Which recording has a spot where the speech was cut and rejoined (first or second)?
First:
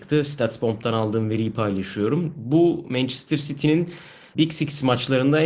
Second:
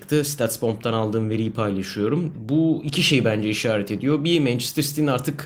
second